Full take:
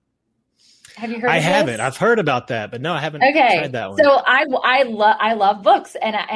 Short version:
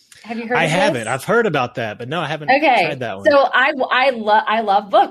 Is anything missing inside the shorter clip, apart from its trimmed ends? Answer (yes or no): no